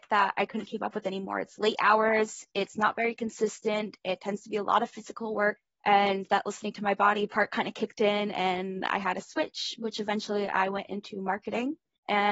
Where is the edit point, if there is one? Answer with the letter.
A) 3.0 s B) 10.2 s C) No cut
C